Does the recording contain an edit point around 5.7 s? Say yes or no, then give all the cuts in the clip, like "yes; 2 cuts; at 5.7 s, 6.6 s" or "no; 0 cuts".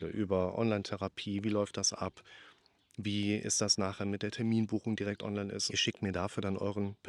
yes; 1 cut; at 5.7 s